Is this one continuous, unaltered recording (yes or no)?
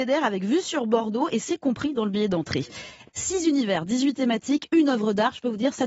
no